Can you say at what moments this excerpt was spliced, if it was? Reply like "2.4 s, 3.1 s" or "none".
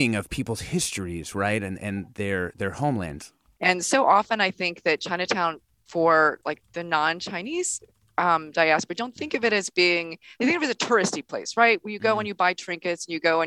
3.6 s